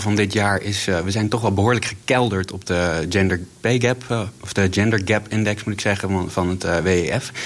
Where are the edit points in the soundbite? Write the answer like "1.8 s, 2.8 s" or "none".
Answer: none